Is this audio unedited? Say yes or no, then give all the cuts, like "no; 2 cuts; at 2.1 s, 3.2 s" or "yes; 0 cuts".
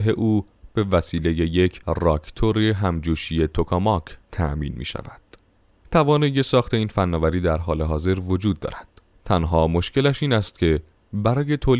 yes; 0 cuts